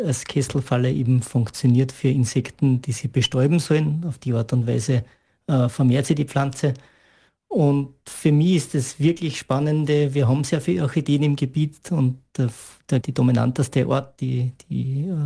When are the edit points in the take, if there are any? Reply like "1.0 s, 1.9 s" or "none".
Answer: 13.0 s